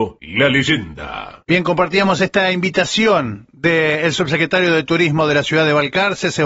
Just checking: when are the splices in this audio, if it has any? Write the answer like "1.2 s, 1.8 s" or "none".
none

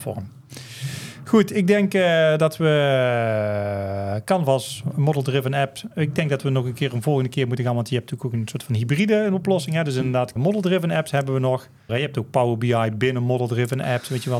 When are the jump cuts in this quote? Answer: 10.4 s, 11.9 s

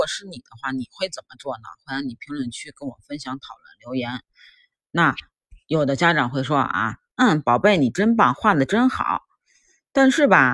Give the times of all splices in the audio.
none

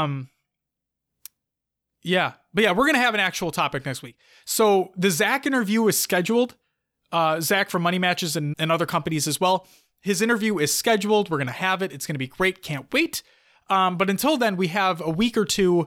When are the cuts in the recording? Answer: 8.5 s

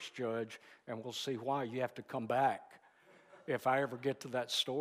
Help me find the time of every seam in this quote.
none

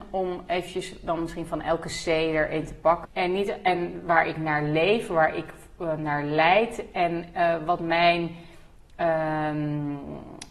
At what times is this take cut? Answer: 3.0 s

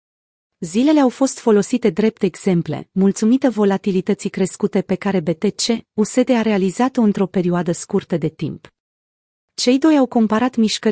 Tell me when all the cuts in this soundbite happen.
none

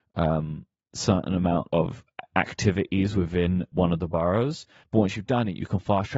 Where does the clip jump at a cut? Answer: 1.7 s

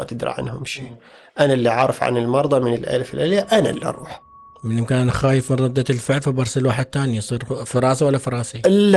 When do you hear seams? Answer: none

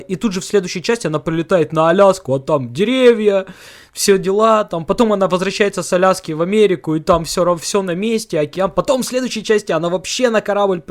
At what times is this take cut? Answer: none

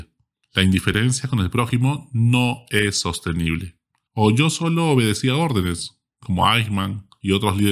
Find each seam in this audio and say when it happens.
4.1 s

